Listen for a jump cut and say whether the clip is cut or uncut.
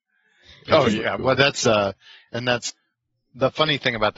uncut